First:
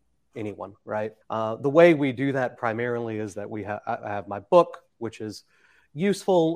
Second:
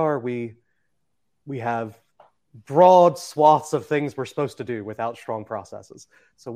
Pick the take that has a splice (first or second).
first